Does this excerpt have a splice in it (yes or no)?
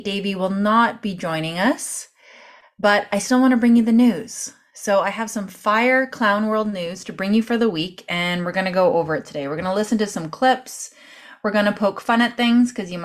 no